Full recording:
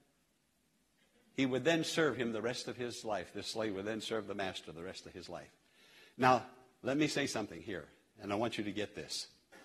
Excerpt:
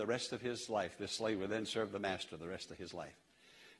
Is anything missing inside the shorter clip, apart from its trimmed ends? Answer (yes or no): no